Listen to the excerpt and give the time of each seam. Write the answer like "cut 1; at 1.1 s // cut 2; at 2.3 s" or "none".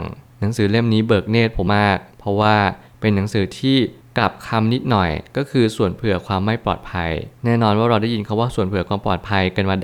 cut 1; at 1.7 s